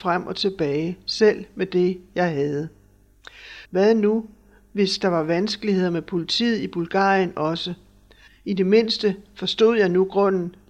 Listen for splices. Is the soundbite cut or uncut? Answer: cut